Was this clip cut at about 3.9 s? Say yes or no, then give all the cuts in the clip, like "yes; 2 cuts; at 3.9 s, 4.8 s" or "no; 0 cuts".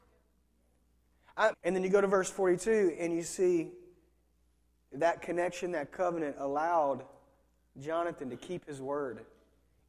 no; 1 cut; at 1.5 s